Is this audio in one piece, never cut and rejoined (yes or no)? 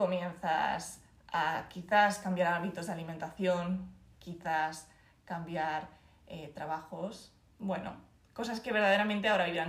yes